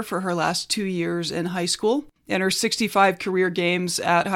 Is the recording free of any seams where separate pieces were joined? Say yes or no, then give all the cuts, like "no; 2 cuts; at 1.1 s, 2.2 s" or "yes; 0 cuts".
no; 1 cut; at 2.2 s